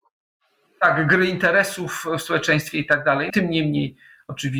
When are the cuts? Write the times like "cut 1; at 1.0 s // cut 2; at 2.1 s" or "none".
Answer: cut 1; at 3.3 s